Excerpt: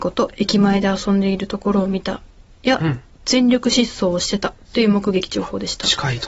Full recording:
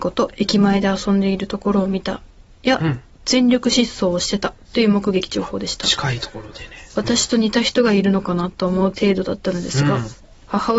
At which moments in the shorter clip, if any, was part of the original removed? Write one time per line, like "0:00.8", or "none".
none